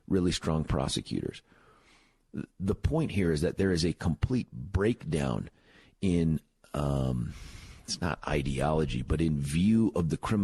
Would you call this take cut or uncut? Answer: uncut